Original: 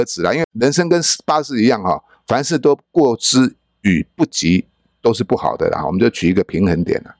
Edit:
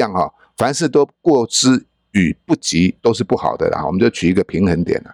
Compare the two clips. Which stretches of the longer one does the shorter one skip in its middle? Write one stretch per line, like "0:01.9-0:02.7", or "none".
0:04.7-0:05.0